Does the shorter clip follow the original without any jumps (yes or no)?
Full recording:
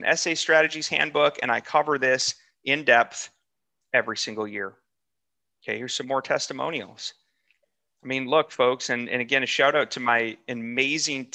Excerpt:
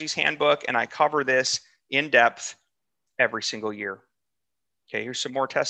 yes